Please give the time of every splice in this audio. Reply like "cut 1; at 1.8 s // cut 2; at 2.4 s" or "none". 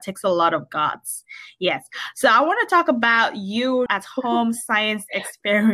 cut 1; at 3.9 s